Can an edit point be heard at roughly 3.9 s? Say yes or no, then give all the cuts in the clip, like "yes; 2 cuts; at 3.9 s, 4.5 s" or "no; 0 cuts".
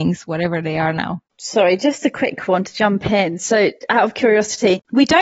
no; 1 cut; at 1.3 s